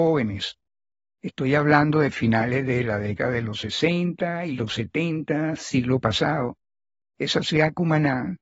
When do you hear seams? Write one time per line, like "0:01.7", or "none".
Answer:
0:07.0